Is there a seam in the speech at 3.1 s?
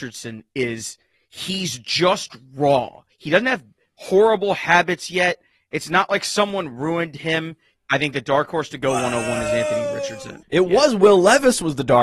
yes; 3 cuts; at 3.1 s, 7.7 s, 10.4 s

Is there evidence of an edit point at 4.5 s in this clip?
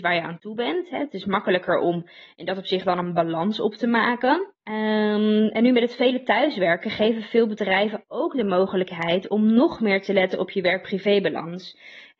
yes; 1 cut; at 4.5 s

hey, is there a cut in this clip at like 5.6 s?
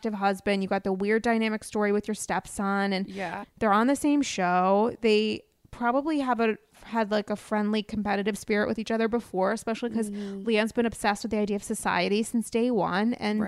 no; 1 cut; at 3.4 s

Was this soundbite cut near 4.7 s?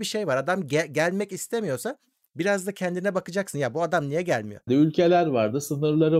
yes; 1 cut; at 4.7 s

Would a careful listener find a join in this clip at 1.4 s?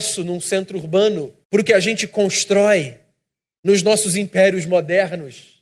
yes; 1 cut; at 1.4 s

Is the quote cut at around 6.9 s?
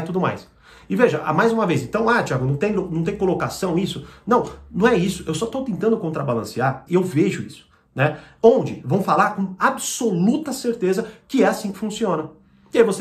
yes; 1 cut; at 6.9 s

